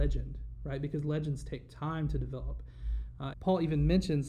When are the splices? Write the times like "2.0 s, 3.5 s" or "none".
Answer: 3.3 s